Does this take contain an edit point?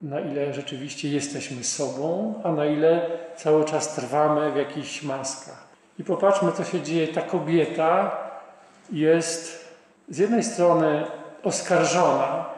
no; 0 cuts

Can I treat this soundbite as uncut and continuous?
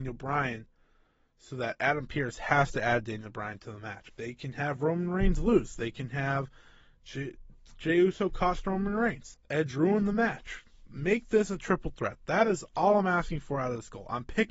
no; 2 cuts; at 4.1 s, 9.3 s

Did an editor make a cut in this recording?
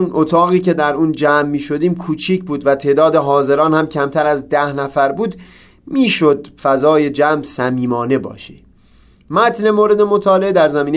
no; 0 cuts

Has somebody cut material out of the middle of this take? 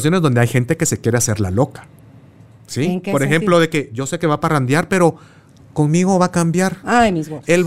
no; 0 cuts

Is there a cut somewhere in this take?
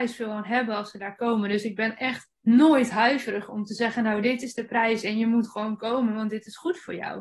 yes; 1 cut; at 2.3 s

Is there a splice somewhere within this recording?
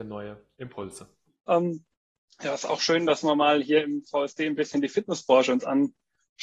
yes; 1 cut; at 1.5 s

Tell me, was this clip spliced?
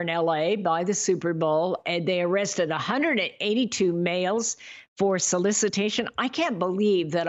no; 0 cuts

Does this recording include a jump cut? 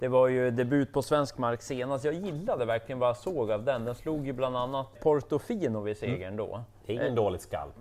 yes; 1 cut; at 4.9 s

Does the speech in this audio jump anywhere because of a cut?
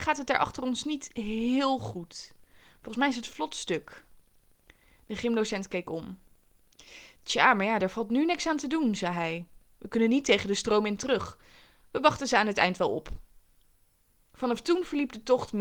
no; 0 cuts

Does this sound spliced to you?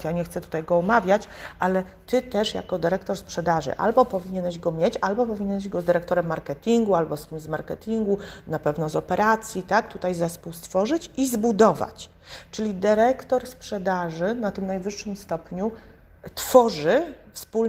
no; 0 cuts

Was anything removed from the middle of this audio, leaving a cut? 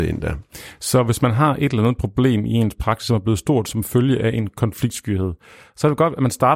no; 0 cuts

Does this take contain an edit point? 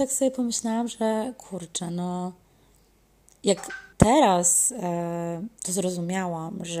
yes; 1 cut; at 3.9 s

